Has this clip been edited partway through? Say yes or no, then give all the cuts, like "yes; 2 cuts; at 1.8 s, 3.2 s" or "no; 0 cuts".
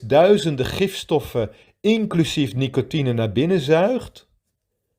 no; 0 cuts